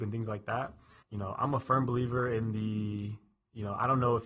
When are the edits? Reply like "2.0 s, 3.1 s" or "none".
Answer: 1.0 s